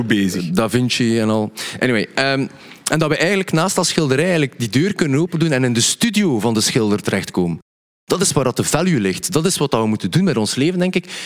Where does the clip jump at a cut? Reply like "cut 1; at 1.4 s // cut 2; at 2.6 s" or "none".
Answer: none

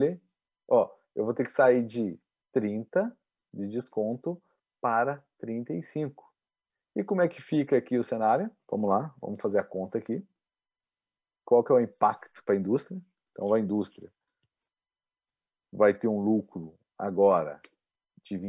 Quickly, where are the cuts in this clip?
none

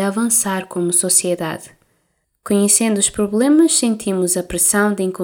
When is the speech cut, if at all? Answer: cut 1; at 2.2 s

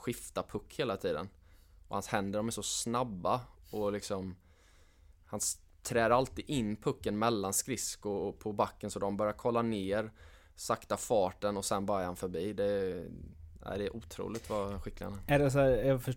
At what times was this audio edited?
none

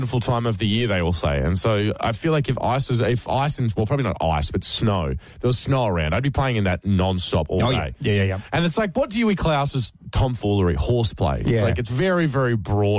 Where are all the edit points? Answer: none

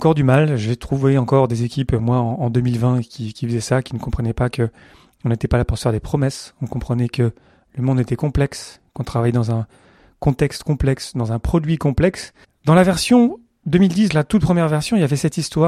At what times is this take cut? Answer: cut 1; at 12.4 s // cut 2; at 14.1 s

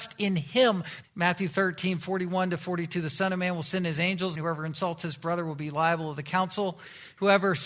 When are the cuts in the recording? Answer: cut 1; at 1.0 s // cut 2; at 4.4 s

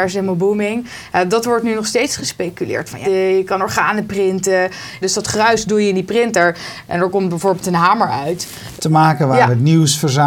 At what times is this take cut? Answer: cut 1; at 3.0 s // cut 2; at 5.0 s // cut 3; at 8.8 s

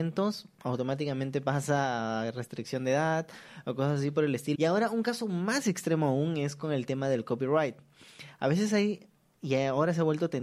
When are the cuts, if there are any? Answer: cut 1; at 4.5 s

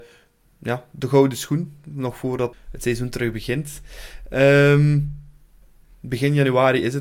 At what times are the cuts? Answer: cut 1; at 2.5 s // cut 2; at 5.8 s

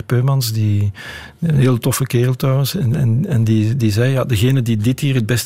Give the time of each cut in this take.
none

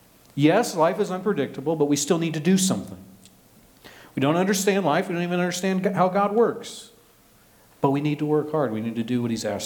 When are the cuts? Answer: none

